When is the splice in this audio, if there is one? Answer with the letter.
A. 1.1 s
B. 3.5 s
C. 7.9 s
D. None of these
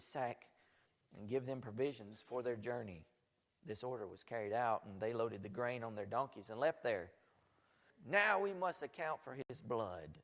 C